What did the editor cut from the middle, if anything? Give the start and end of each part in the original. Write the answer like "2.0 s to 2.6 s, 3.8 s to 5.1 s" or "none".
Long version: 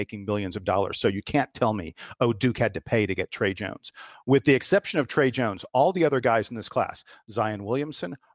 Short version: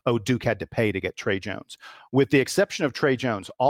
none